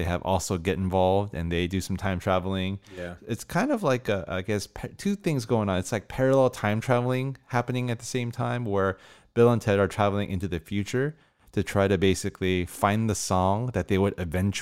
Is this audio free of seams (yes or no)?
yes